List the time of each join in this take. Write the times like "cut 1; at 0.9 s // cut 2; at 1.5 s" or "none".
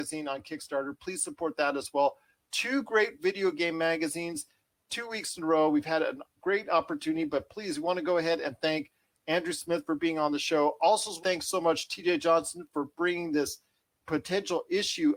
cut 1; at 11.2 s